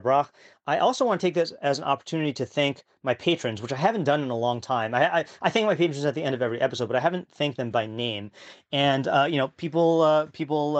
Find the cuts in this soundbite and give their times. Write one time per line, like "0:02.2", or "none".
none